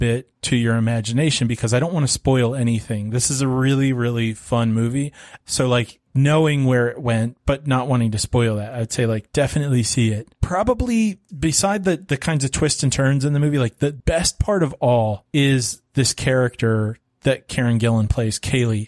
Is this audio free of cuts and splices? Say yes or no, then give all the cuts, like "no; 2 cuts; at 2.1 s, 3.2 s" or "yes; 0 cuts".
no; 1 cut; at 5.4 s